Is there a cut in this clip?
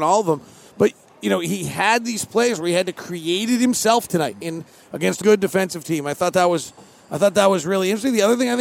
yes; 1 cut; at 5.2 s

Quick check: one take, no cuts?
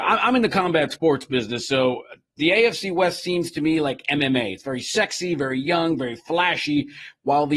yes; 0 cuts

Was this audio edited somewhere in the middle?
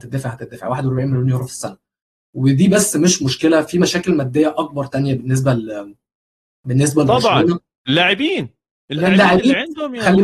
no; 0 cuts

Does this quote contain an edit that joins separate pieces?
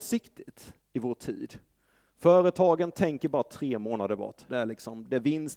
yes; 1 cut; at 4.5 s

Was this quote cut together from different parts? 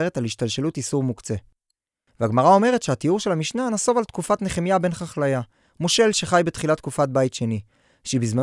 no; 0 cuts

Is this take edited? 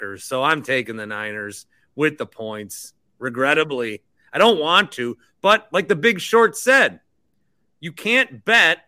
no; 0 cuts

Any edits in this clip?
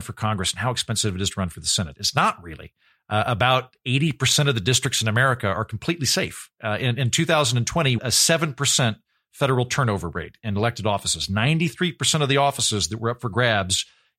yes; 1 cut; at 8.0 s

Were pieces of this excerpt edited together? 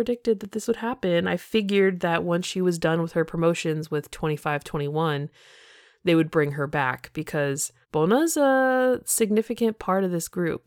yes; 1 cut; at 7.8 s

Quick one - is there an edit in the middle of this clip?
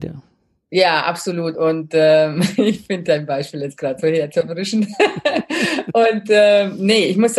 no; 0 cuts

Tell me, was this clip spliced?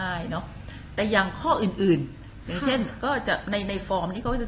no; 0 cuts

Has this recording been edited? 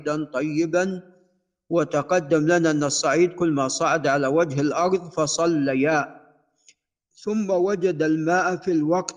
no; 0 cuts

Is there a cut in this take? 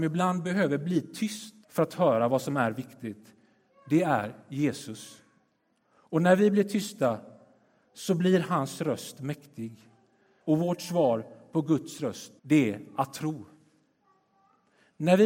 yes; 3 cuts; at 1.6 s, 10.4 s, 12.4 s

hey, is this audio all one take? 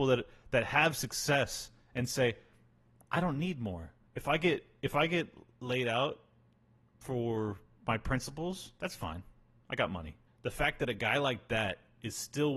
no; 1 cut; at 10.3 s

